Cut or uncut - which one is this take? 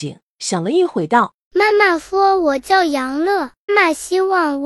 cut